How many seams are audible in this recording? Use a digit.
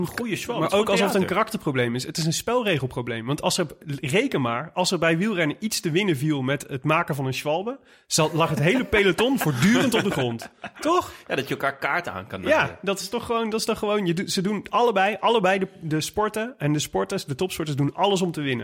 0